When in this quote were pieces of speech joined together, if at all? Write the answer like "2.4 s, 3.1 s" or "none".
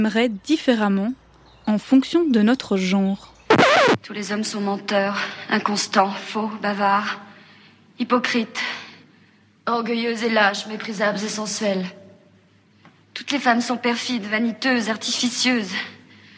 none